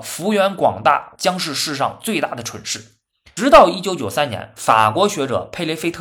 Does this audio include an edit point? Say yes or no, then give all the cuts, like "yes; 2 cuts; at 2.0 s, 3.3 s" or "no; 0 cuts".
yes; 2 cuts; at 1.2 s, 3.4 s